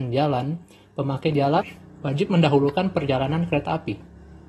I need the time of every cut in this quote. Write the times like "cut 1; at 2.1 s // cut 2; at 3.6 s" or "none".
none